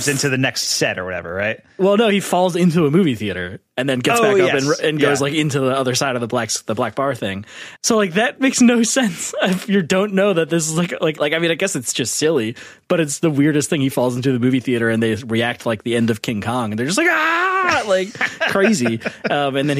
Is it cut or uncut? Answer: cut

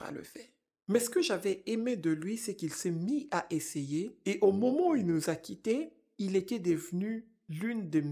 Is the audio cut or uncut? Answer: uncut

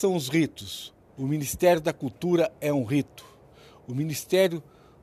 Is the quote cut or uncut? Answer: cut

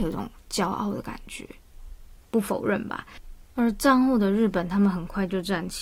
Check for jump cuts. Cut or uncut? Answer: cut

